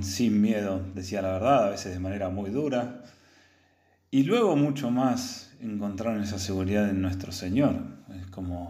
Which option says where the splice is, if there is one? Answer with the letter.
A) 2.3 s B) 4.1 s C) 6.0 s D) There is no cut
D